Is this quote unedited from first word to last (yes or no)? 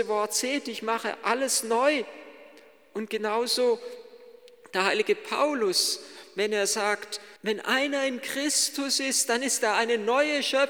no